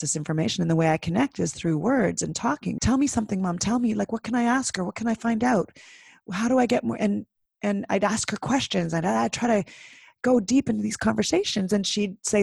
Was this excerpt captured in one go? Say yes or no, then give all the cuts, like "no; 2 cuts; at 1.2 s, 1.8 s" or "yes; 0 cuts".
no; 1 cut; at 2.8 s